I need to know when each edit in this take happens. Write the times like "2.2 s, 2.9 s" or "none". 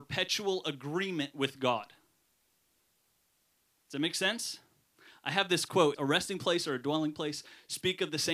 5.9 s